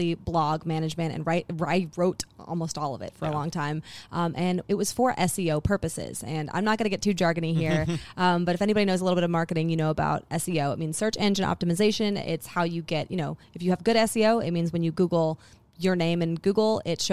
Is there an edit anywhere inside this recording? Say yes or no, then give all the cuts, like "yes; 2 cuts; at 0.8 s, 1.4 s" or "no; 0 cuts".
no; 0 cuts